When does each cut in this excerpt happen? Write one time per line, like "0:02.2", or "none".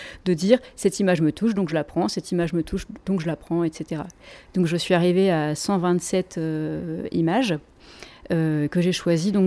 none

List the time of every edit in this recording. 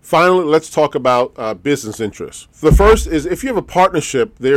0:02.5

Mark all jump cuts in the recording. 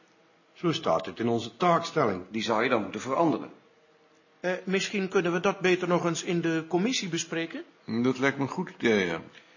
none

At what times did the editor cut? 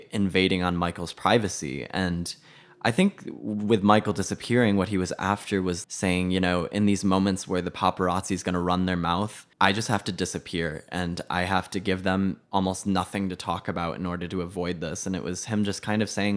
0:05.8
0:09.5

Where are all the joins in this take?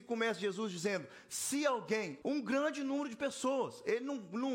0:02.2

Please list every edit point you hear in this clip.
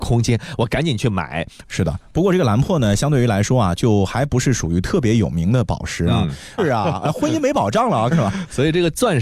0:01.6
0:06.6
0:08.1

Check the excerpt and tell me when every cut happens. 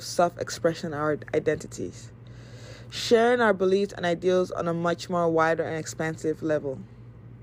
none

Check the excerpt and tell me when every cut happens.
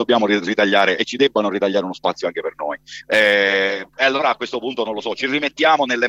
0:03.0

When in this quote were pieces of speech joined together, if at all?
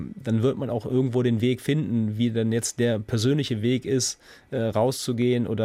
none

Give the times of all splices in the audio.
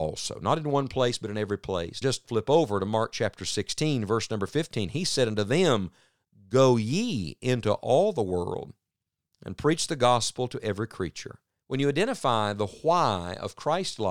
0:02.0
0:11.6

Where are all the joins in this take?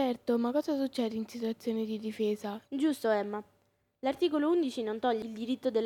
0:02.6

